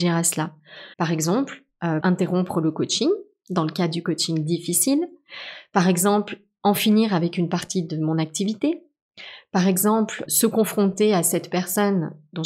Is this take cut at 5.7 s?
no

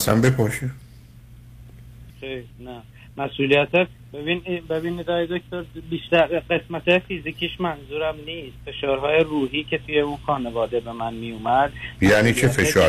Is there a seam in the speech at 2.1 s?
yes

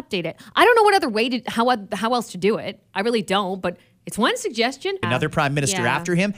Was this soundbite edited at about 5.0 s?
yes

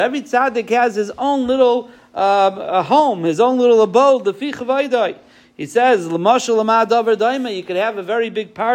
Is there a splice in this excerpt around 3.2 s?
no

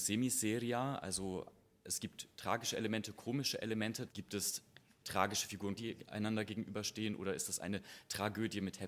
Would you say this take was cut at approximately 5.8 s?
yes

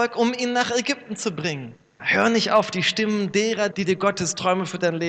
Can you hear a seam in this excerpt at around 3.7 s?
yes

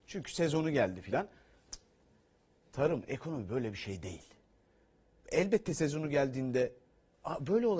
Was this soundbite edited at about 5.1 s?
yes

